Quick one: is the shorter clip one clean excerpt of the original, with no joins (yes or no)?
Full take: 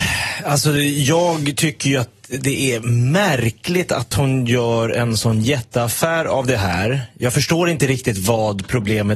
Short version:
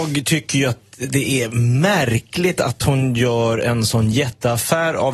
yes